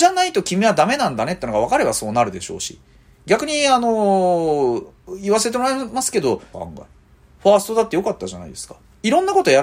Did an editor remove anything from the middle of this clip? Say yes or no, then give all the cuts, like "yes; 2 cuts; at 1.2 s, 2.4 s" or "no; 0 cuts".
yes; 1 cut; at 6.5 s